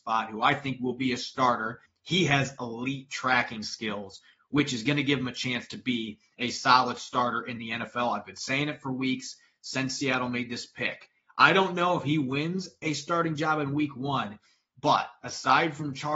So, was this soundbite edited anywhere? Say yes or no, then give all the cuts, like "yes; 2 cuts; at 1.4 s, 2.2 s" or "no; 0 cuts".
yes; 1 cut; at 1.9 s